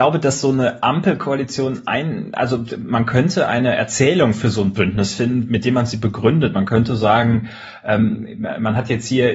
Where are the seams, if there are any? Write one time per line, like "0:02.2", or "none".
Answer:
none